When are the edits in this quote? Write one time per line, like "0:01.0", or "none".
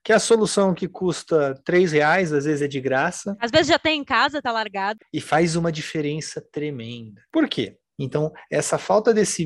0:05.0
0:07.9